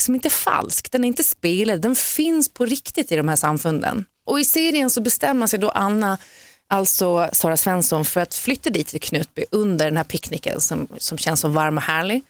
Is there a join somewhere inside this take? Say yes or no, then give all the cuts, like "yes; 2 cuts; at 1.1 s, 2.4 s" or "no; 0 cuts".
no; 0 cuts